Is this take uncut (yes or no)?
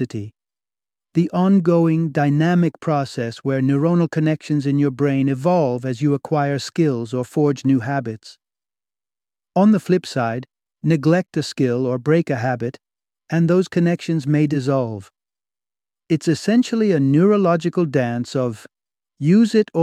yes